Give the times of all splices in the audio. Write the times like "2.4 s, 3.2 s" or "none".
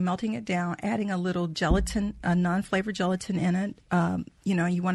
3.8 s